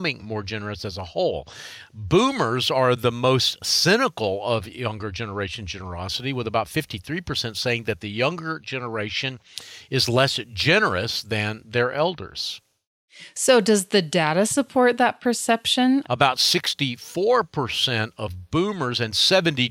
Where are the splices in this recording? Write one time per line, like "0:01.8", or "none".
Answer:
0:16.0

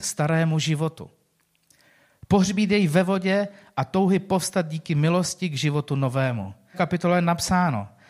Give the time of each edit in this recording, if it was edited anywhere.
0:06.7

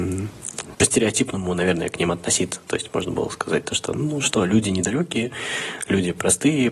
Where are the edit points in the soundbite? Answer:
none

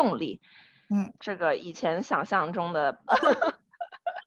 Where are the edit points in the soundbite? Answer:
0:01.2
0:03.1

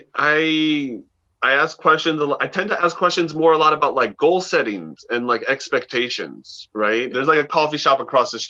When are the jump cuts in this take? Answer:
0:07.1

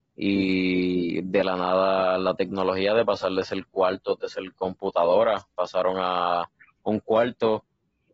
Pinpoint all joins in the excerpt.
none

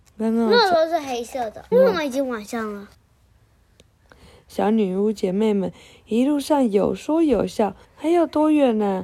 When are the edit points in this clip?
0:01.7
0:02.9
0:07.8

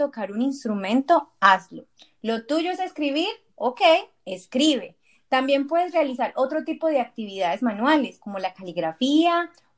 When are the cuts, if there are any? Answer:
none

